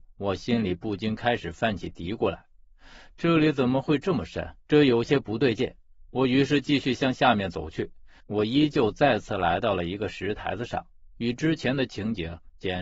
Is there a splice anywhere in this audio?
yes; 2 cuts; at 4.7 s, 8.2 s

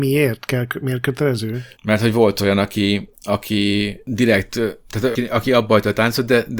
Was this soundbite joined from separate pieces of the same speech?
yes; 2 cuts; at 1.8 s, 5.2 s

